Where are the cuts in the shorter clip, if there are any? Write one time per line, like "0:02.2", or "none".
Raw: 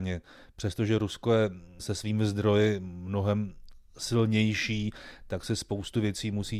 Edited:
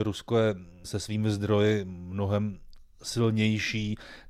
none